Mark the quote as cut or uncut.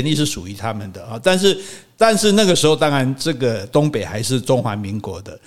uncut